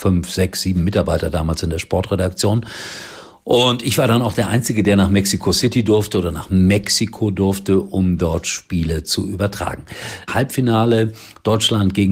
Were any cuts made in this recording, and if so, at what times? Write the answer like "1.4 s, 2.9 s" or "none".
10.3 s